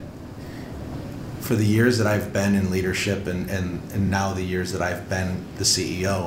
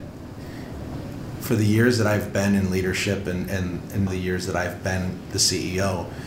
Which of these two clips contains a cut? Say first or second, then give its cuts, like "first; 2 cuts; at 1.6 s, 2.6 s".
second; 1 cut; at 4.1 s